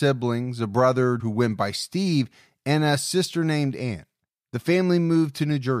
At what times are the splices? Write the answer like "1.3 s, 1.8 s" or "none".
1.2 s